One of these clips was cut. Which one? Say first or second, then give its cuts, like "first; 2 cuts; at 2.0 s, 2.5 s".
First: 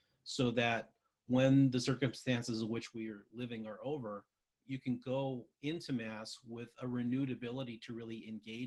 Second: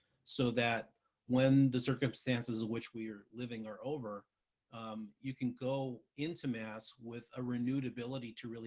first; 1 cut; at 4.6 s